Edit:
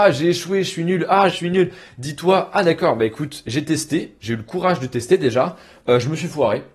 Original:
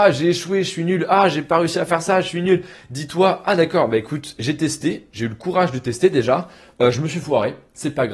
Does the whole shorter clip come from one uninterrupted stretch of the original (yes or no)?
no